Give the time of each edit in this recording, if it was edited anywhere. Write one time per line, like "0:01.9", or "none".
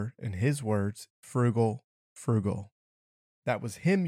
0:01.1